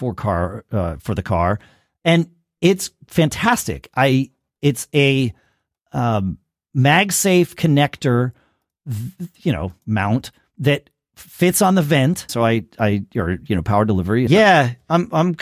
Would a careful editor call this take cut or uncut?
cut